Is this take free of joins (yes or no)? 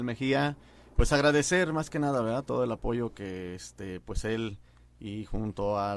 yes